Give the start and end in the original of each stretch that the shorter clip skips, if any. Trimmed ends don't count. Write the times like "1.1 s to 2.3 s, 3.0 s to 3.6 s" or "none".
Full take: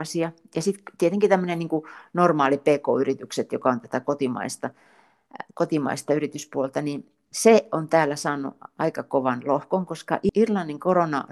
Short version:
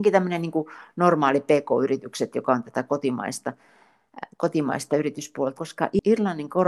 6.7 s to 9.9 s